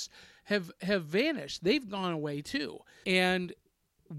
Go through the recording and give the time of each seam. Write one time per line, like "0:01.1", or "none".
0:03.0